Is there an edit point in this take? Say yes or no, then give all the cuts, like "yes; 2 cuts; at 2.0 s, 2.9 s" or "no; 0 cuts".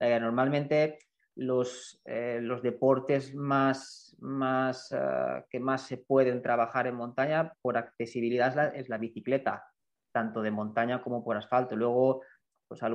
no; 0 cuts